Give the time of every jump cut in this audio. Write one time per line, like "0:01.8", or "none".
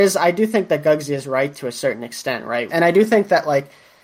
0:02.7